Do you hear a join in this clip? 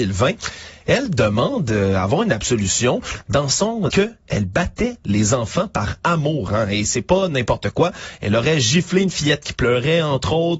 yes; 1 cut; at 3.9 s

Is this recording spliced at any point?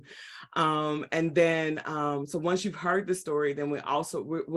no; 0 cuts

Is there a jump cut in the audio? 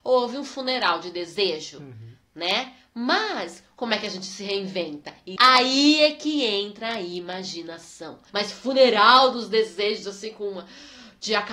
yes; 2 cuts; at 5.4 s, 8.3 s

